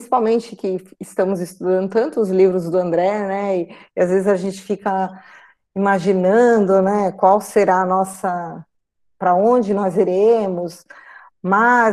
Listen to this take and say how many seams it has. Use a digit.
0